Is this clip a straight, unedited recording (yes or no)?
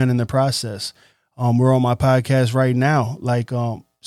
yes